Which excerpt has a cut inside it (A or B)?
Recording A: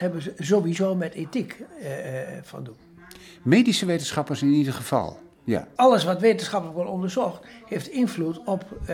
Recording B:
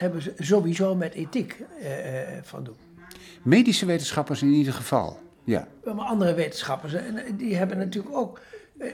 A